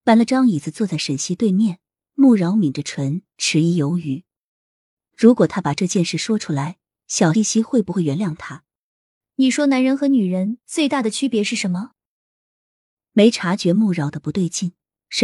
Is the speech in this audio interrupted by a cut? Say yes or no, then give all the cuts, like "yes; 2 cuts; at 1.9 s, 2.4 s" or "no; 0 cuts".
yes; 2 cuts; at 7.3 s, 9.2 s